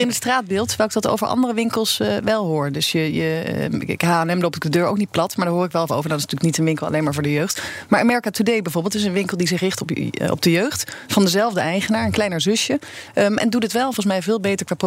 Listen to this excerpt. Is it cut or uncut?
uncut